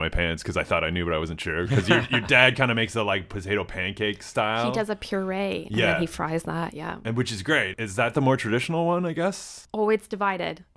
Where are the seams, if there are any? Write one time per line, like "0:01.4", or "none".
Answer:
none